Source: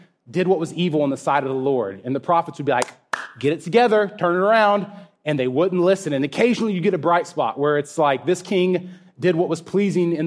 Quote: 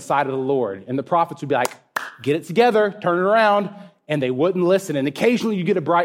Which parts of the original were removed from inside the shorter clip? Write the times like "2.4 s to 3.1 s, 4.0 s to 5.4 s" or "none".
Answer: none